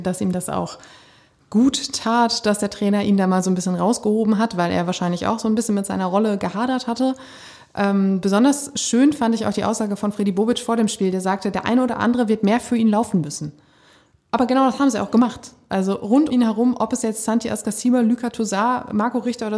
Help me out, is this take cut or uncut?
cut